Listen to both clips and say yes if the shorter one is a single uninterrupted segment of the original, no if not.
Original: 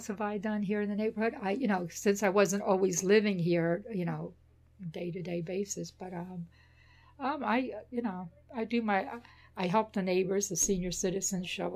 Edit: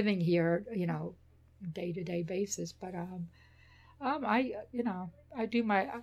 yes